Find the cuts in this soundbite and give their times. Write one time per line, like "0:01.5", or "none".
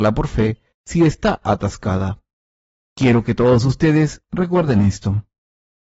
0:02.8